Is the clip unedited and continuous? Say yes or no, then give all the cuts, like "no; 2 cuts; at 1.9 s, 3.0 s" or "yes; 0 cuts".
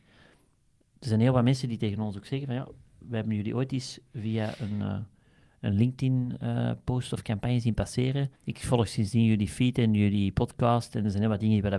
no; 1 cut; at 8.4 s